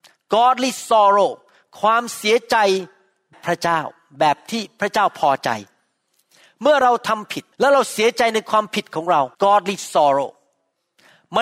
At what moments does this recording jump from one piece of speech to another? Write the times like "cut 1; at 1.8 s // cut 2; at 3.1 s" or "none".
cut 1; at 3.3 s // cut 2; at 7.5 s // cut 3; at 9.3 s